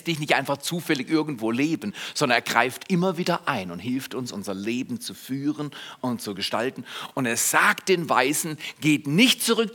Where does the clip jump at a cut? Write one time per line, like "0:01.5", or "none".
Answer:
none